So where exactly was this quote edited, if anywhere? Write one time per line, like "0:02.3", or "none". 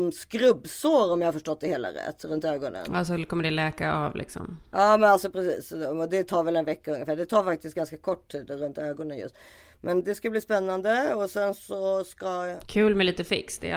0:10.0